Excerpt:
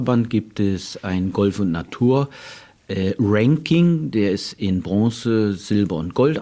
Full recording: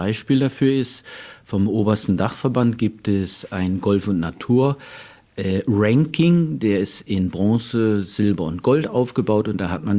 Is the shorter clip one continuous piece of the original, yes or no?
yes